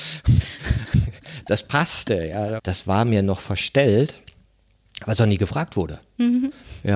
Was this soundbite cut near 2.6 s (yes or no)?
yes